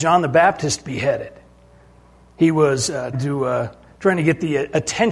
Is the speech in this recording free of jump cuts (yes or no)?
no